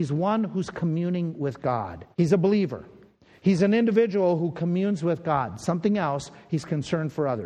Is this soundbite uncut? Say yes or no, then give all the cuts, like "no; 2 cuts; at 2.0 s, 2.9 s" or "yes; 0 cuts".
no; 1 cut; at 2.1 s